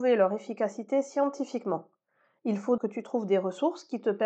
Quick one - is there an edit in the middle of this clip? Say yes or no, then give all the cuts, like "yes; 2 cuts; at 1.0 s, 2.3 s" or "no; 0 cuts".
yes; 1 cut; at 2.8 s